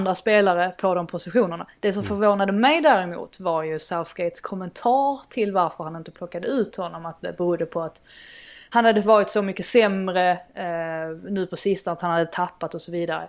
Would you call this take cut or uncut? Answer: uncut